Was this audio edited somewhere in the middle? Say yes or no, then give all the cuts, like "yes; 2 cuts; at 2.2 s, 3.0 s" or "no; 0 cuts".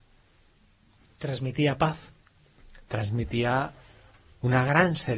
no; 0 cuts